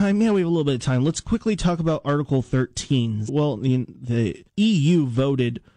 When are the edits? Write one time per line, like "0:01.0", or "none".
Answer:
0:03.3
0:04.5

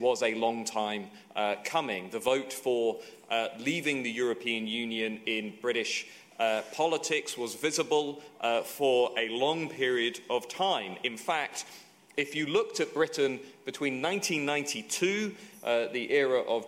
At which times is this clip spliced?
none

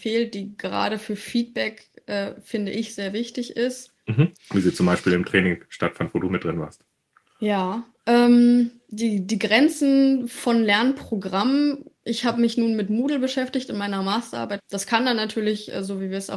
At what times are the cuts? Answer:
0:04.4
0:14.6

